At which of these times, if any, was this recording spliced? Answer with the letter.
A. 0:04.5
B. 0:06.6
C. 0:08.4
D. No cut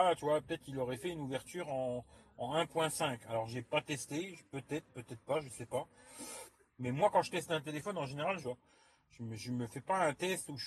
C